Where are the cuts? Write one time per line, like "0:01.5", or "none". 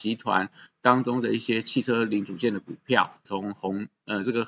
0:03.2